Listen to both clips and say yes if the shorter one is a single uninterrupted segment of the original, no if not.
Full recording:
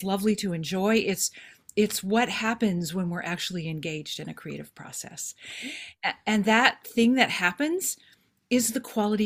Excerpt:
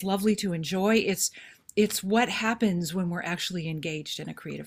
yes